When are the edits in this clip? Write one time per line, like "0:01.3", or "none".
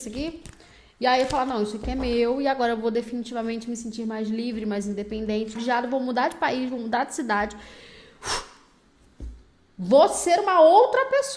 0:05.6